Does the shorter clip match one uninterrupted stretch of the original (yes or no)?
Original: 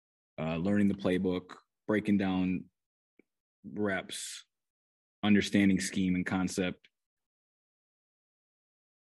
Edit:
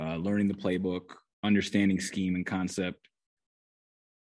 no